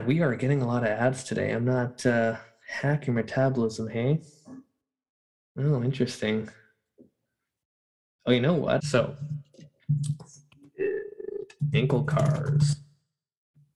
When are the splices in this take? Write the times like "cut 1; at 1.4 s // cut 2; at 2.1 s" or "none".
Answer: cut 1; at 8.8 s